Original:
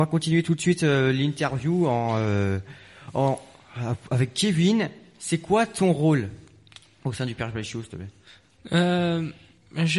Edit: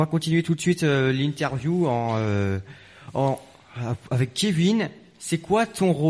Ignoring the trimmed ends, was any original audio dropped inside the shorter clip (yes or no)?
no